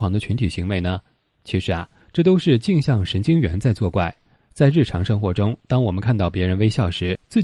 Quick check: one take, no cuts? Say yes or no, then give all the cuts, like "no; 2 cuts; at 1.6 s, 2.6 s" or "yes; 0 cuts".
yes; 0 cuts